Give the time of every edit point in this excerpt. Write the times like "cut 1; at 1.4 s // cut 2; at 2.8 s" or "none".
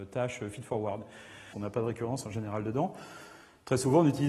cut 1; at 1.5 s